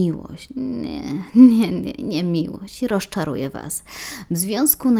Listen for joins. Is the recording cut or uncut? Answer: cut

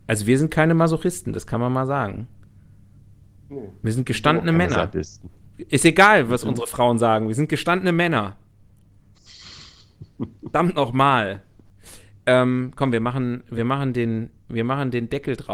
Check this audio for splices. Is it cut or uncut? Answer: uncut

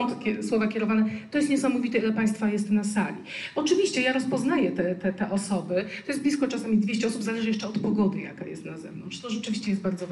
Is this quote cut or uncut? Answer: uncut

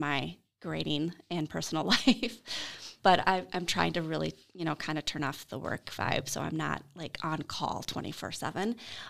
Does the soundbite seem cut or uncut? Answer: cut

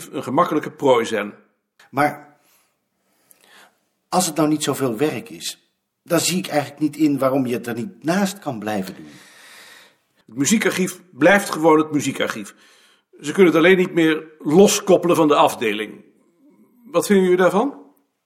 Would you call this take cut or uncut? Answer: cut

